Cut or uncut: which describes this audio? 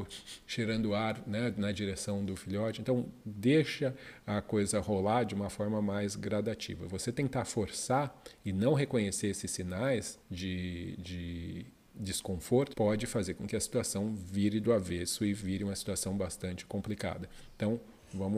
cut